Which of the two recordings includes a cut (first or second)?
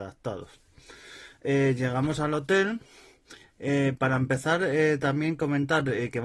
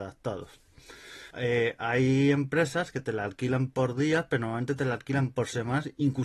second